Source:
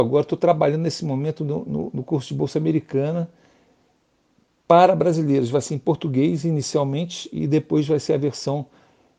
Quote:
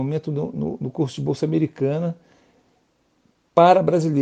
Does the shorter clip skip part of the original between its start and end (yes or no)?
no